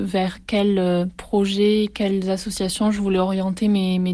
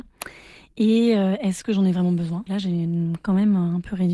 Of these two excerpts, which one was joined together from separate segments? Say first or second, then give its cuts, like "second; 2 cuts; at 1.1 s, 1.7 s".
second; 1 cut; at 2.5 s